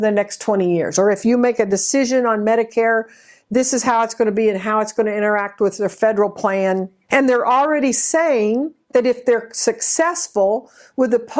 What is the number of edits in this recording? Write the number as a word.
one